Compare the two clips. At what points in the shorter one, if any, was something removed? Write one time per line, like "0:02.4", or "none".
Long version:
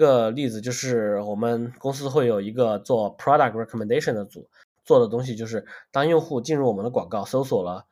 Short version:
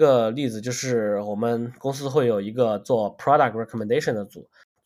none